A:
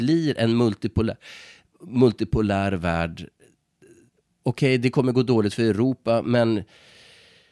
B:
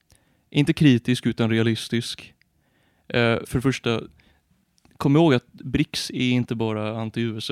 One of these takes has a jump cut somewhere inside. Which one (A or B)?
B